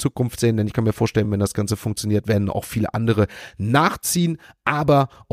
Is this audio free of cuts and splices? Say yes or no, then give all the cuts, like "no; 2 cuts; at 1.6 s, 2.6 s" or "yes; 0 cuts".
yes; 0 cuts